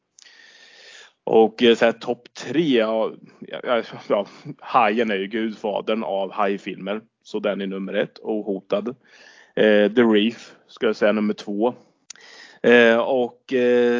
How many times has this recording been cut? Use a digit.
0